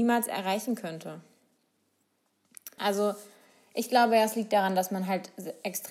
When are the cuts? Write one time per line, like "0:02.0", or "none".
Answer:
0:02.8